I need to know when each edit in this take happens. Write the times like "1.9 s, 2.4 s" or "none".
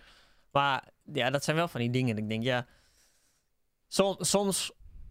none

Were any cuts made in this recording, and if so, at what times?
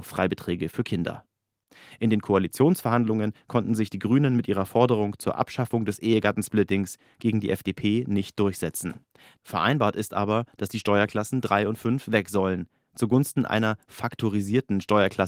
none

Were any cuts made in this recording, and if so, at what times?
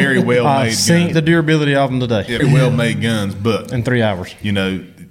1.1 s, 2.4 s

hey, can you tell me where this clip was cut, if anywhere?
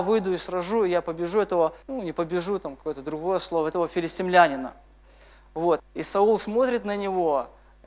1.8 s, 5.8 s

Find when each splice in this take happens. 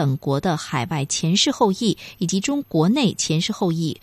2.6 s

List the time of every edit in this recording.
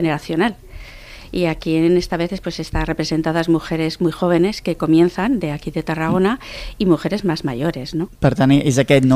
8.1 s

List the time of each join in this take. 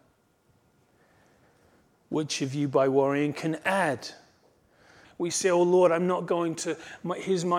5.0 s

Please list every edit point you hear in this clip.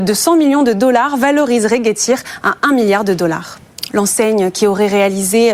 3.9 s

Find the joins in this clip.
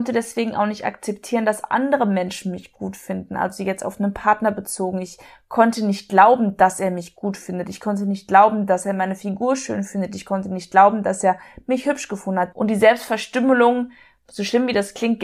12.5 s

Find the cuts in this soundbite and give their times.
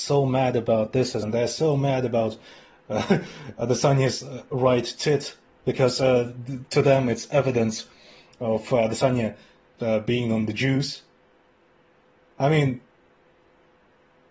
1.2 s

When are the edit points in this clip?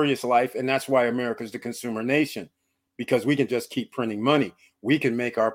none

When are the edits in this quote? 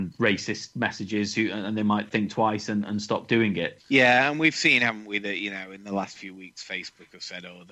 3.8 s

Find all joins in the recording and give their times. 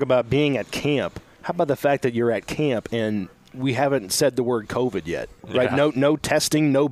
5.4 s

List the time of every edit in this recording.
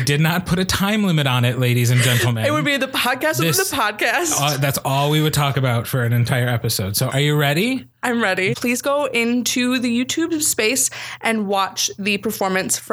7.1 s, 8.5 s

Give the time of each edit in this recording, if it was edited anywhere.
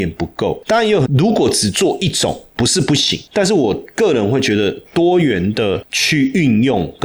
1.1 s

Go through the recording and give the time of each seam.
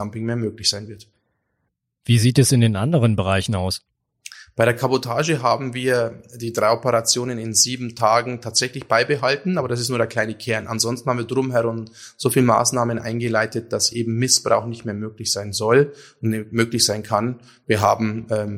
none

